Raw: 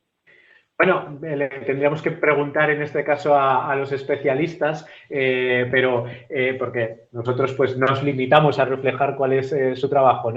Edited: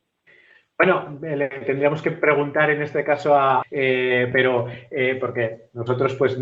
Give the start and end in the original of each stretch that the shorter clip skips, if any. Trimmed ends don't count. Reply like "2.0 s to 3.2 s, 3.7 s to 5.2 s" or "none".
3.6 s to 5.0 s